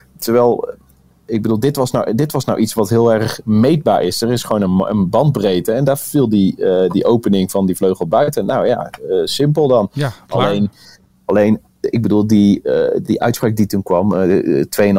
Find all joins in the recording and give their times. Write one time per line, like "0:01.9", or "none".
none